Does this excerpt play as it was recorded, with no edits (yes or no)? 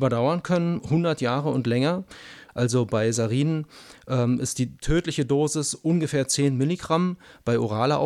no